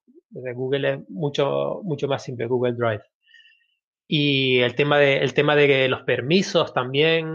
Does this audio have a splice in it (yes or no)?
no